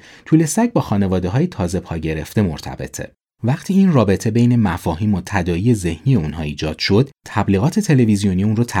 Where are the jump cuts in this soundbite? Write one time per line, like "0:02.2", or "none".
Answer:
0:03.4